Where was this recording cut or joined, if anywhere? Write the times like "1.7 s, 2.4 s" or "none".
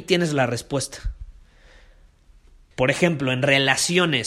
2.7 s